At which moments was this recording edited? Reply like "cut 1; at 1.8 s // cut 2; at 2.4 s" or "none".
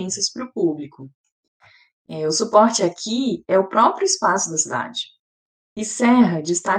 none